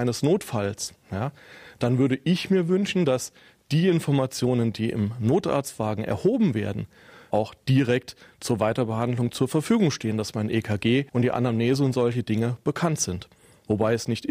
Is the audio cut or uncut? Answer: cut